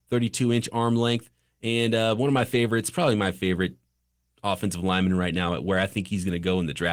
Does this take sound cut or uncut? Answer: uncut